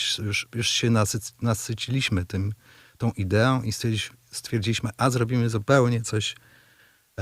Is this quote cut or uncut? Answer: uncut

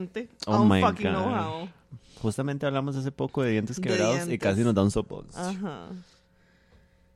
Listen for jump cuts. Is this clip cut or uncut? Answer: uncut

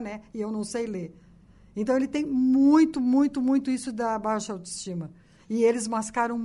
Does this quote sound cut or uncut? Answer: uncut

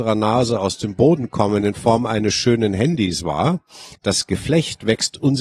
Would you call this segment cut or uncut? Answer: cut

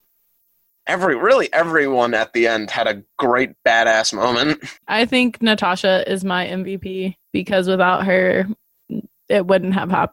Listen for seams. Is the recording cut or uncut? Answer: cut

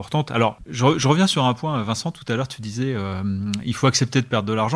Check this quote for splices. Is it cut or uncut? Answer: uncut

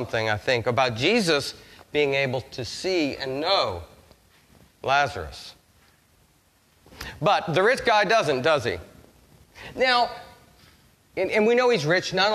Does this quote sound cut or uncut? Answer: uncut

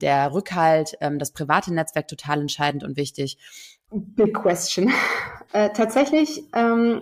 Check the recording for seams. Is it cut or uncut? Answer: cut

